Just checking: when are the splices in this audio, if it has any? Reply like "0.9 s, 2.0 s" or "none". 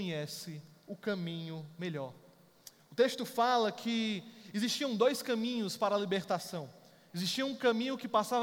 none